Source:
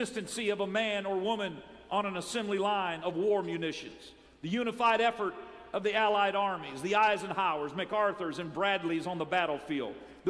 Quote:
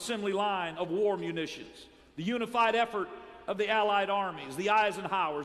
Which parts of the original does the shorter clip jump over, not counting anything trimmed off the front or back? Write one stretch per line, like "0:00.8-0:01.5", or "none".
none